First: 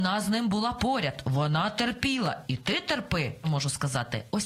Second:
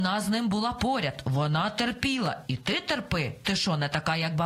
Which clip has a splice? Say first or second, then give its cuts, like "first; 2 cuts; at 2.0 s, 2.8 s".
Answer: first; 1 cut; at 3.4 s